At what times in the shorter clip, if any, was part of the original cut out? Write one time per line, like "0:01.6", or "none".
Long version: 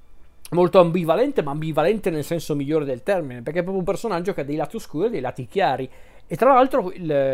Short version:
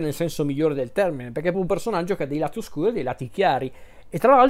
0:01.5